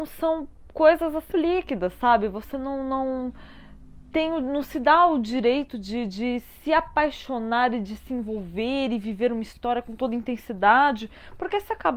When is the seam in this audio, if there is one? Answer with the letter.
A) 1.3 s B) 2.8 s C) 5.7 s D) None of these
A